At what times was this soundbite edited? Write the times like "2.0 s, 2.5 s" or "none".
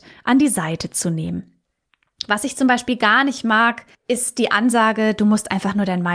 3.9 s